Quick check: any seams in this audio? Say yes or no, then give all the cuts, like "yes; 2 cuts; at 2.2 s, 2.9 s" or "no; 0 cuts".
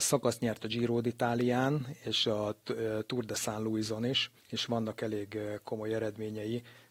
yes; 1 cut; at 4.4 s